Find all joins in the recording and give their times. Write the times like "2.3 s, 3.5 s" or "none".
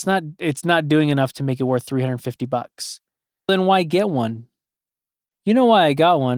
3.5 s